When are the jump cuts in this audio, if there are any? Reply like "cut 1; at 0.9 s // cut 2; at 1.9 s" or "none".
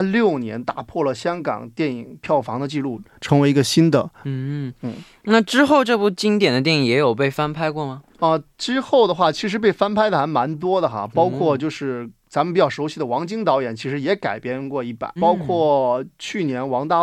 cut 1; at 4.2 s // cut 2; at 8.1 s // cut 3; at 15.2 s